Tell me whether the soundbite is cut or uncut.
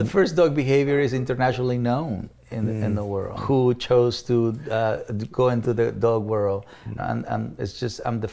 cut